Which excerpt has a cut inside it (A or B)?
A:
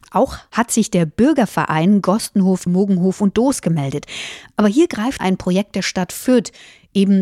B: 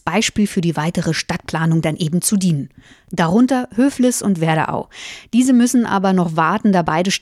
A